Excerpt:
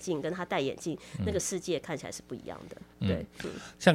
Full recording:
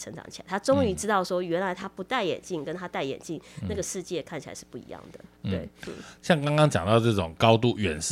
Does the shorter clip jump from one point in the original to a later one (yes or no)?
no